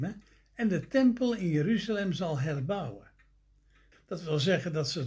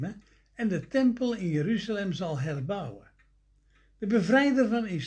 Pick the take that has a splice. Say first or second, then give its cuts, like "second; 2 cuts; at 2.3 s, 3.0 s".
first; 1 cut; at 3.9 s